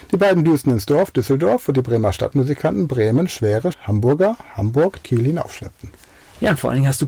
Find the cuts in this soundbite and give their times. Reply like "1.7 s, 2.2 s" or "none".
3.7 s, 5.0 s

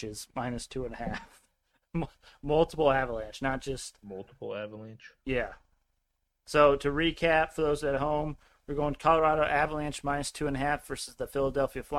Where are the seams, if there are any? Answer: none

